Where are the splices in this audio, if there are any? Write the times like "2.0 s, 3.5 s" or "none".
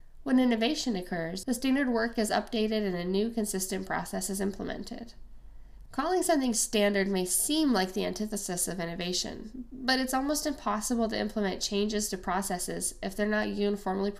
1.4 s, 5.9 s